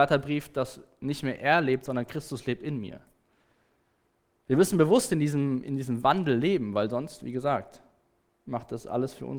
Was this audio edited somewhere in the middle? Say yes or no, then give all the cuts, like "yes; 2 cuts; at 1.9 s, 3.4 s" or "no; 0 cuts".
no; 0 cuts